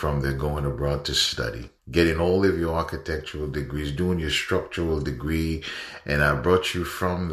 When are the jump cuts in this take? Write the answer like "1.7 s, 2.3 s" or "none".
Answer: 1.8 s